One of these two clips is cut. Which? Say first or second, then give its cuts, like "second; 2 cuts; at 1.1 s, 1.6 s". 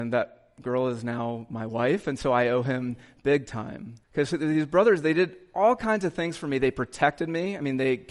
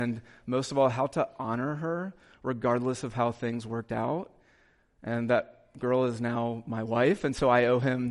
first; 1 cut; at 4.0 s